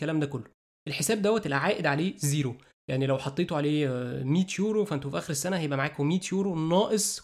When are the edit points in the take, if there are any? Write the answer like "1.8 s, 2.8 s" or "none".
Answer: none

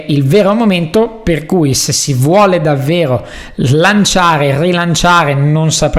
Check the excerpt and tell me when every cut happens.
none

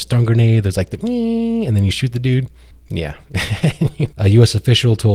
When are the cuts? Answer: 4.1 s

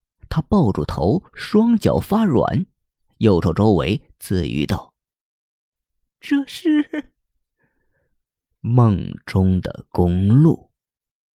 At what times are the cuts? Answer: 3.4 s

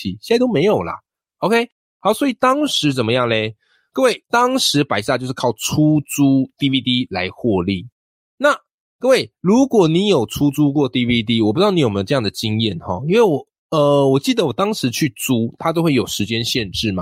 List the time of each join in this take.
none

